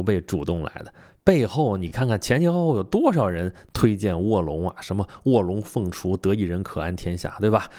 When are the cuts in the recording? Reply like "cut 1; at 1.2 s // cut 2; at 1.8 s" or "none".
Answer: none